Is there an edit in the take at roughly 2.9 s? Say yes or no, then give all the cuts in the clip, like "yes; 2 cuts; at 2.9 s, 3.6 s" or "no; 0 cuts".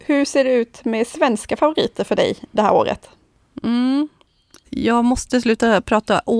no; 1 cut; at 4.6 s